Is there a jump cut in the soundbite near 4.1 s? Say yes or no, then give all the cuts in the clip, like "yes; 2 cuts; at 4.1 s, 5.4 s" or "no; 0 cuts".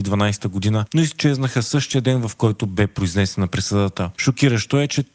yes; 1 cut; at 4.1 s